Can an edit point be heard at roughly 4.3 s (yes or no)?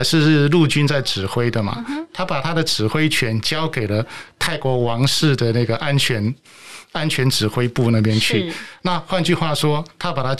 no